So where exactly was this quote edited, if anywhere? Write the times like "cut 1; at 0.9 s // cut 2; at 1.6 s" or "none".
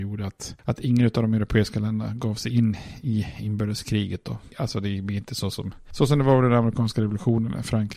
cut 1; at 4.5 s